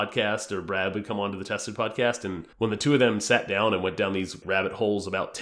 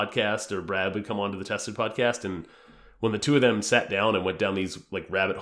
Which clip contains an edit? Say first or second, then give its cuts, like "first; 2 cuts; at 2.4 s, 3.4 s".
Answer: first; 2 cuts; at 2.5 s, 4.4 s